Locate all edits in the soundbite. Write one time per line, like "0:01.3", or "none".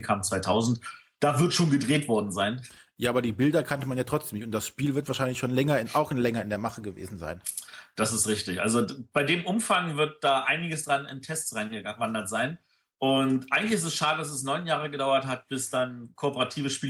none